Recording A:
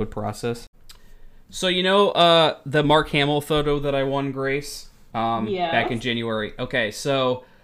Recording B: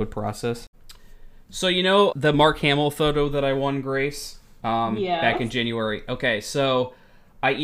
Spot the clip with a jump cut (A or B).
B